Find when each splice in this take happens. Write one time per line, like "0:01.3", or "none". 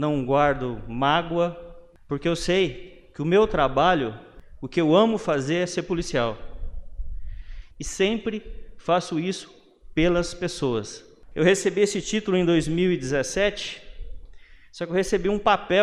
0:07.7
0:11.3